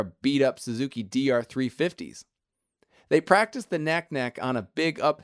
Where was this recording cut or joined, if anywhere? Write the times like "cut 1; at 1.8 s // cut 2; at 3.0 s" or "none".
none